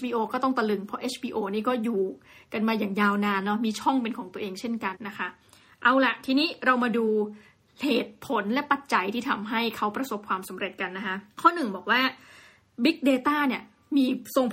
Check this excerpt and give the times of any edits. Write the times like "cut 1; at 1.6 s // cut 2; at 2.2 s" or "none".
cut 1; at 4.9 s // cut 2; at 11.3 s